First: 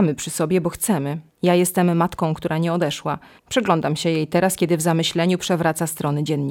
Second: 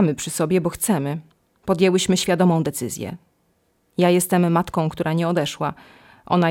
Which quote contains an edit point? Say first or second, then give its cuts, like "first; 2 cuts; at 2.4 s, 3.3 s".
first; 2 cuts; at 1.3 s, 3.4 s